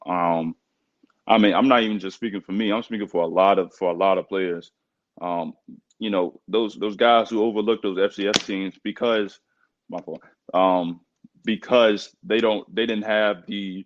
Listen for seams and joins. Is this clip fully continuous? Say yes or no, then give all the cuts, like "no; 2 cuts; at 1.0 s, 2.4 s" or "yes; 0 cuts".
yes; 0 cuts